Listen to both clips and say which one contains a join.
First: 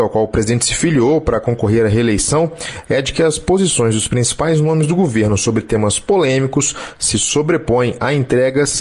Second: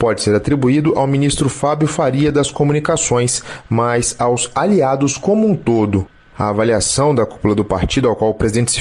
second; 1 cut; at 6.3 s

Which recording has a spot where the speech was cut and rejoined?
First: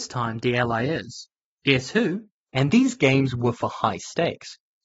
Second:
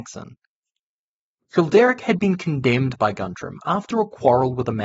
first; 1 cut; at 2.4 s

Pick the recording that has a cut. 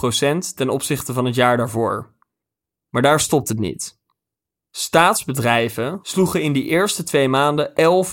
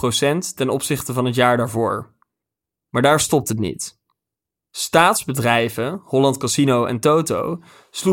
first; 1 cut; at 6.0 s

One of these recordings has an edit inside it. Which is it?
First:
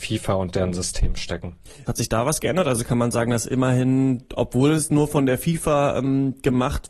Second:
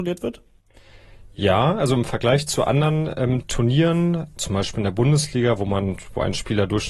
first; 1 cut; at 1.9 s

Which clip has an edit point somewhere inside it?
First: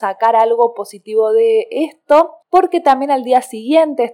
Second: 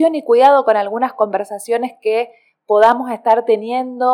first; 1 cut; at 2.4 s

